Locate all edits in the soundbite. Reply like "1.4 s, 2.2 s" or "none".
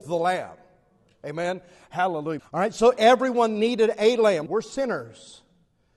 2.4 s, 4.5 s